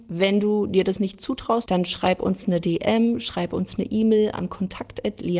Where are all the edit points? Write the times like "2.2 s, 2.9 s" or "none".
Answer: 1.7 s